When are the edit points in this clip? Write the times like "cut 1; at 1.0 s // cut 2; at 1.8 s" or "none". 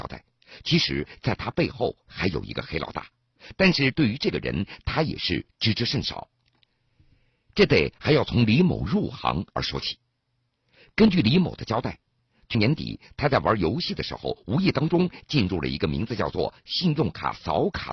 cut 1; at 12.5 s